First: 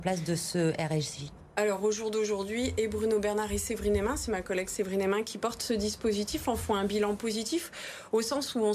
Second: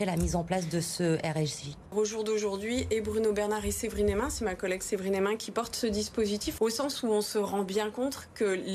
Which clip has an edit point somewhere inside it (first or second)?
second